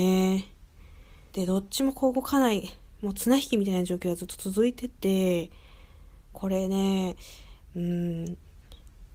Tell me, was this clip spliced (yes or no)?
yes